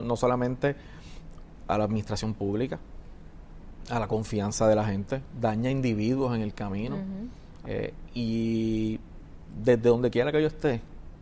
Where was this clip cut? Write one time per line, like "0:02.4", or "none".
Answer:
0:07.6